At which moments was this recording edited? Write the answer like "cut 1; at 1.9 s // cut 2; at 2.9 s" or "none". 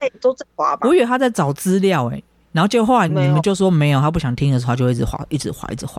cut 1; at 3.1 s